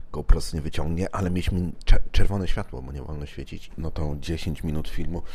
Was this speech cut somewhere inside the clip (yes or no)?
yes